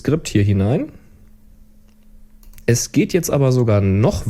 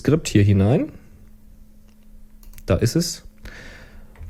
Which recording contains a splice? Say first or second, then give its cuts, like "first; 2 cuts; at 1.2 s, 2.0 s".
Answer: first; 1 cut; at 2.6 s